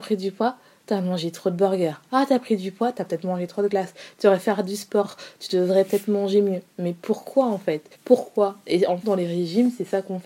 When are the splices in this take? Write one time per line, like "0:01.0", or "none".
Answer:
0:07.9
0:09.0